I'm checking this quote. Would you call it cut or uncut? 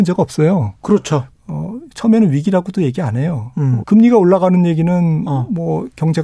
cut